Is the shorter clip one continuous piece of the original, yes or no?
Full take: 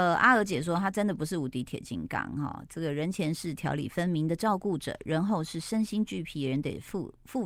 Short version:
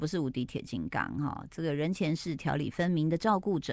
yes